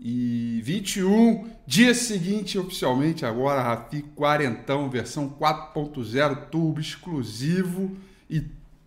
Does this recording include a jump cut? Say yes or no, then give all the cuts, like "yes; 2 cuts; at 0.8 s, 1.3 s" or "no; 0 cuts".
no; 0 cuts